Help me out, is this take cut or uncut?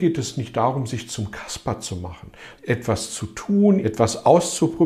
cut